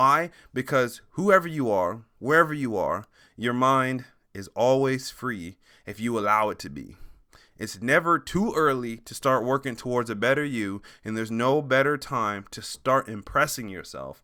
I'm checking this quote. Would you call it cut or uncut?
uncut